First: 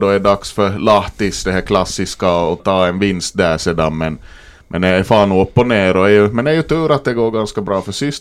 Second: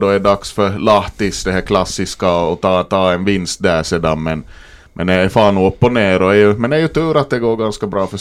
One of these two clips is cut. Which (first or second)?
first